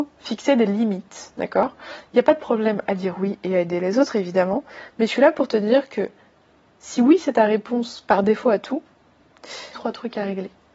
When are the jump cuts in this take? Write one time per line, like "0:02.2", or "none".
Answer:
0:09.7